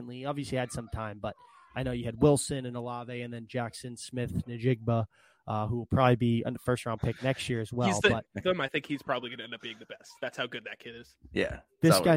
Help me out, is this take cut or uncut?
cut